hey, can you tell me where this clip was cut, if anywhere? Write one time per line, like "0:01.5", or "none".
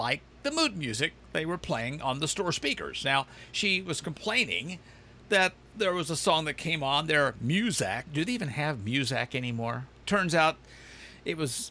0:08.1
0:10.0

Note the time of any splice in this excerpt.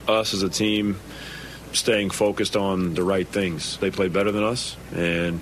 0:03.8

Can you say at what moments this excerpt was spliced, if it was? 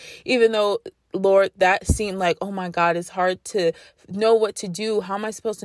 none

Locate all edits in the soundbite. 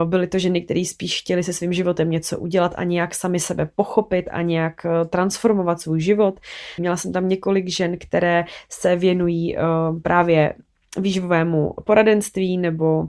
0:06.8

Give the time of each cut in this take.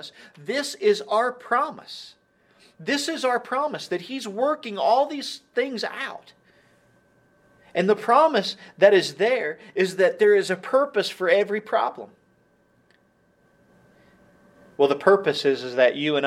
0:14.7

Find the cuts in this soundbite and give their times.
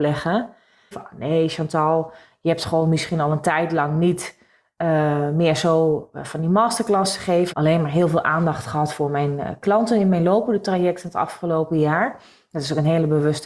0:00.9
0:07.5

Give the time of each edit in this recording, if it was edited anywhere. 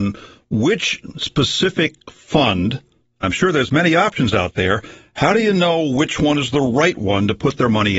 0:03.2

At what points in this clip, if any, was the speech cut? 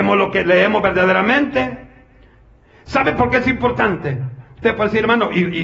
none

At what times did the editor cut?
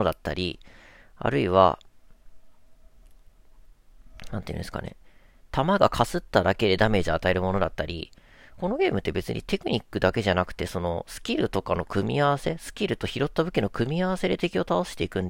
none

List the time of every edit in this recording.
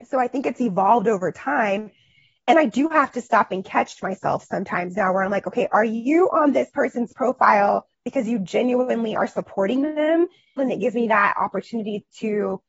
0:07.9
0:10.6

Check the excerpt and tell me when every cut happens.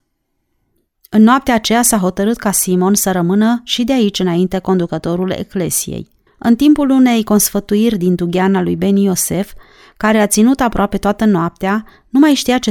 0:06.3

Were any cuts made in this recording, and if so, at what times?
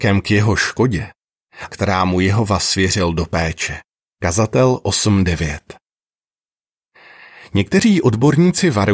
0:01.7

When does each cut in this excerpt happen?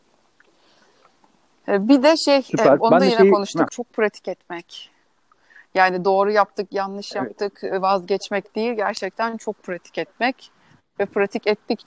0:03.7

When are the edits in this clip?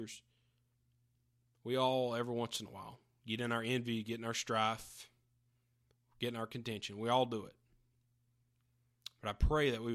none

